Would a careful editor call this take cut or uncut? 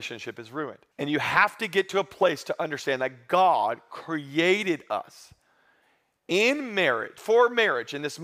cut